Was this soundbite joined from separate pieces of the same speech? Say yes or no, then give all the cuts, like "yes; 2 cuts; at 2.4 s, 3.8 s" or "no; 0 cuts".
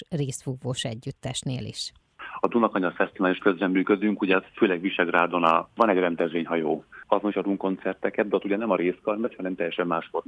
no; 0 cuts